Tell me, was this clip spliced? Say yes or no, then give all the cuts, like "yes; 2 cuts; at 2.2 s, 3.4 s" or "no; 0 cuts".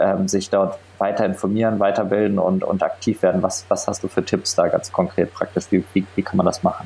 no; 0 cuts